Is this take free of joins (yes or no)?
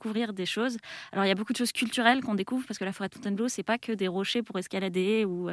yes